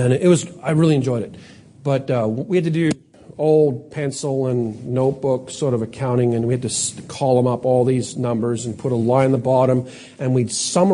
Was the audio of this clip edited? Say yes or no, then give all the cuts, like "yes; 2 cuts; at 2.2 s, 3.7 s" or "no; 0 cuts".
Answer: no; 0 cuts